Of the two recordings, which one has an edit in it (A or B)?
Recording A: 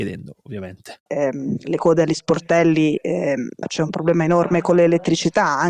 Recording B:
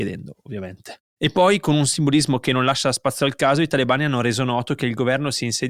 A